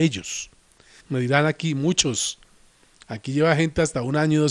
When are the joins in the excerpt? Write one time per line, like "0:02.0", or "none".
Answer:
0:01.0